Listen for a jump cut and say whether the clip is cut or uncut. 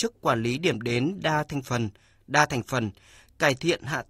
uncut